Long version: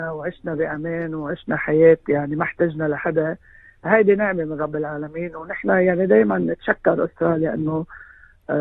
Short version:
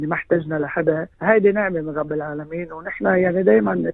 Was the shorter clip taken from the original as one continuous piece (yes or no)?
no